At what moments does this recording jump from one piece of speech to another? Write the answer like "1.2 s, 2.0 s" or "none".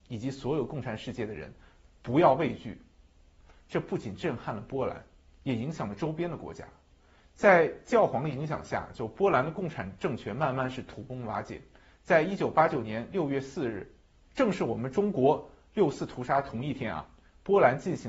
none